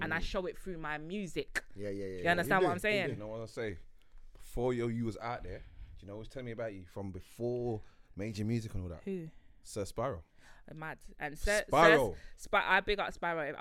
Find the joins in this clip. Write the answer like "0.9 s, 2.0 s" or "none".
none